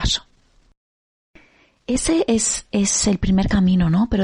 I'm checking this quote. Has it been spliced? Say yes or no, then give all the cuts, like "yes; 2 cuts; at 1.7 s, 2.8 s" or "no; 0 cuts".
no; 0 cuts